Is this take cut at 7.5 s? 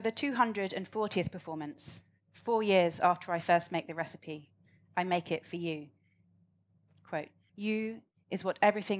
yes; 1 cut; at 7.5 s

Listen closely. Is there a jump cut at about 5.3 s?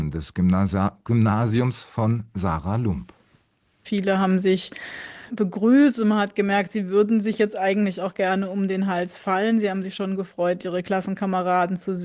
yes; 1 cut; at 5.3 s

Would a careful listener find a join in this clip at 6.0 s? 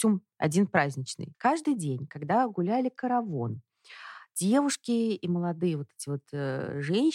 no; 1 cut; at 1.3 s

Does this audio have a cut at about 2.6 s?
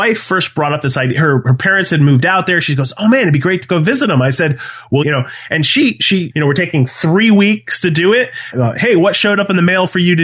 no; 3 cuts; at 5.0 s, 6.3 s, 8.5 s

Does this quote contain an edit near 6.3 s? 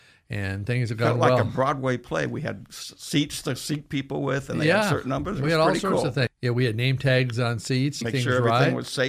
yes; 2 cuts; at 6.3 s, 8.0 s

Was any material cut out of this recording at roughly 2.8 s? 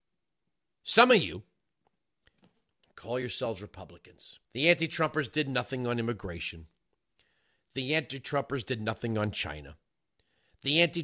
yes; 2 cuts; at 2.8 s, 4.5 s

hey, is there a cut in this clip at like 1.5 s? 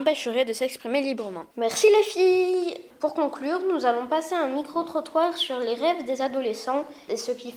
yes; 1 cut; at 1.5 s

